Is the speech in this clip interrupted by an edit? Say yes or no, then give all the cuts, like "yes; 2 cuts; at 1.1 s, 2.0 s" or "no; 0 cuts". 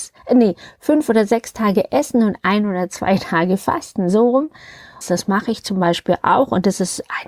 yes; 1 cut; at 5.0 s